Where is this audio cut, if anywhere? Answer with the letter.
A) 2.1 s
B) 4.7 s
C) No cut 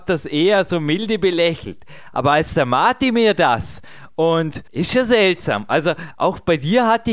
B